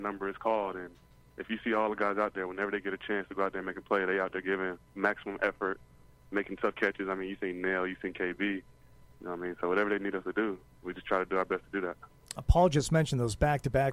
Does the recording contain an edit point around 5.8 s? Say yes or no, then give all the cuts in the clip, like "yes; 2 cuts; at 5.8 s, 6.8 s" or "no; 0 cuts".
no; 0 cuts